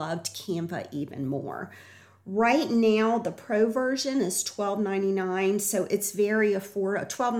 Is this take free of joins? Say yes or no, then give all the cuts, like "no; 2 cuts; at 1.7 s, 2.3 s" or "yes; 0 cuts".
yes; 0 cuts